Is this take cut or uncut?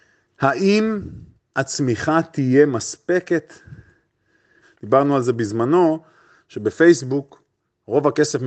cut